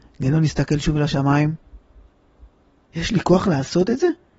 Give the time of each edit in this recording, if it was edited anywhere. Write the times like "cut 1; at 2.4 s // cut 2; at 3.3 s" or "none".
cut 1; at 2.8 s